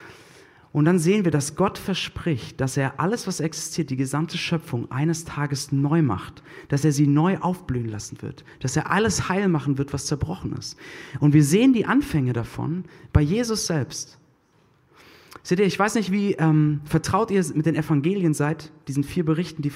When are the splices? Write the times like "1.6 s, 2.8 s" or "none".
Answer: none